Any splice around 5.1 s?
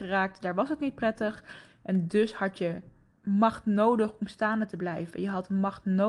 no; 1 cut; at 3.2 s

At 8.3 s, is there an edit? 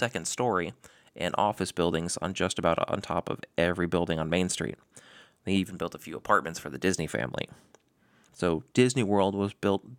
yes; 1 cut; at 8.3 s

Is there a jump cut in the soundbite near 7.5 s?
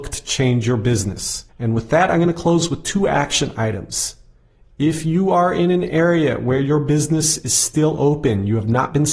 no; 1 cut; at 1.5 s

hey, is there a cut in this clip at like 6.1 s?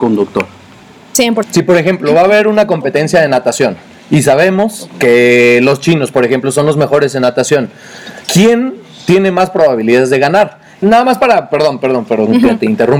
no; 3 cuts; at 1.4 s, 8.2 s, 10.8 s

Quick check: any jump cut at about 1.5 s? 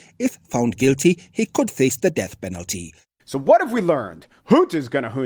no; 1 cut; at 3.2 s

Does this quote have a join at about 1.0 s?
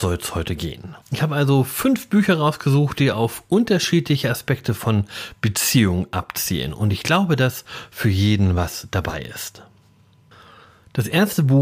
yes; 1 cut; at 1.0 s

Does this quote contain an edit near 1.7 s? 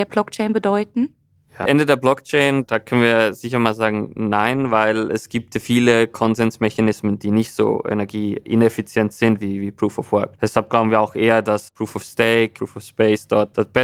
yes; 1 cut; at 1.7 s

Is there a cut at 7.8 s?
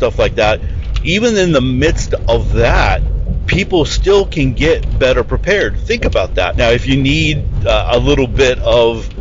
no; 1 cut; at 6.5 s

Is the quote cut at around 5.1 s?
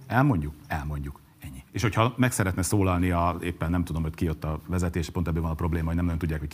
no; 1 cut; at 1.7 s

